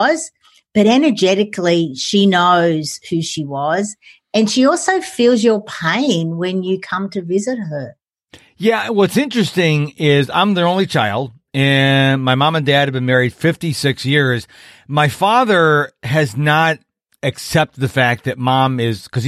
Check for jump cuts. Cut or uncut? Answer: uncut